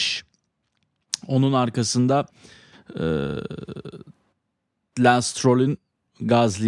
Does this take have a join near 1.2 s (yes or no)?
no